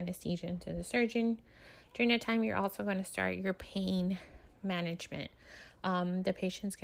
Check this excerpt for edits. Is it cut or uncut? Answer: uncut